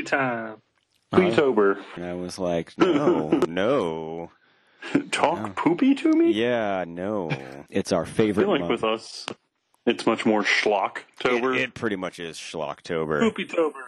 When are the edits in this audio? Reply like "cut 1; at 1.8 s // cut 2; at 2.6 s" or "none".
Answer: cut 1; at 2.0 s // cut 2; at 7.7 s